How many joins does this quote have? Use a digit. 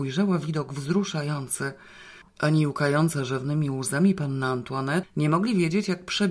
2